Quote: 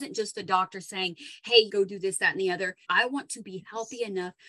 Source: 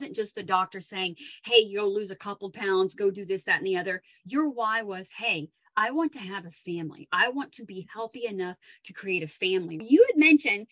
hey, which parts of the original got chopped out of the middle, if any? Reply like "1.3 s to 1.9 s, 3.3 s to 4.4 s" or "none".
1.7 s to 2.9 s, 4.1 s to 7.1 s